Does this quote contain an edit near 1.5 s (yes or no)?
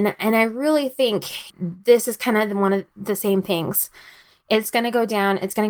yes